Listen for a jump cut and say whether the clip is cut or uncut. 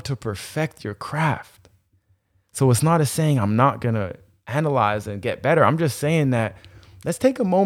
uncut